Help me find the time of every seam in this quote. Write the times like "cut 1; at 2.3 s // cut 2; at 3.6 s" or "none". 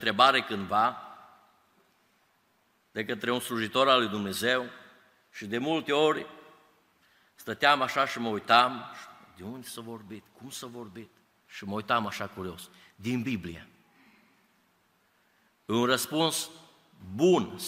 cut 1; at 11.5 s